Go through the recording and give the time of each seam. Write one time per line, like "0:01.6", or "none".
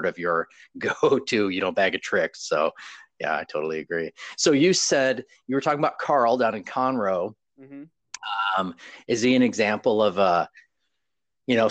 none